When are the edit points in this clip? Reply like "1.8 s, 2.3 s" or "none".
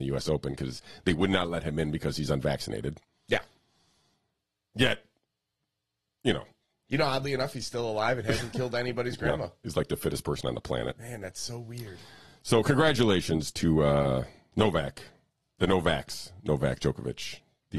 14.5 s